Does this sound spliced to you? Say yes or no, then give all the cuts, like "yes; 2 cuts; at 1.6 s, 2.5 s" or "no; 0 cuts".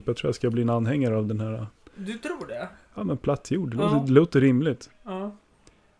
no; 0 cuts